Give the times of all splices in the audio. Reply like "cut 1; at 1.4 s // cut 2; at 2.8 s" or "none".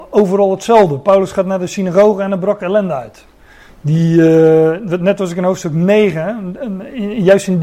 cut 1; at 3.7 s